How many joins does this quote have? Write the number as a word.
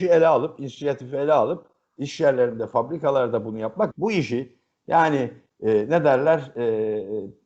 one